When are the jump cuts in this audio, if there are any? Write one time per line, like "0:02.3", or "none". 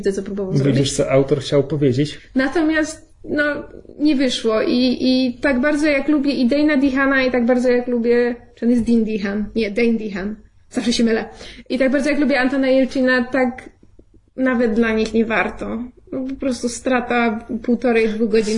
0:02.2